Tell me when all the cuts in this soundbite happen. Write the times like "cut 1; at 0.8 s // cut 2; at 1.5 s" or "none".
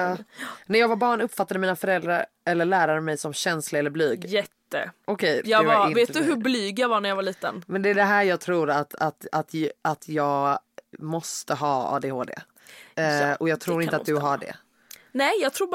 cut 1; at 5.4 s